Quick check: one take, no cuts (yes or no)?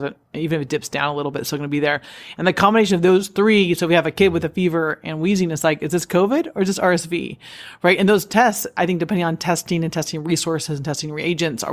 yes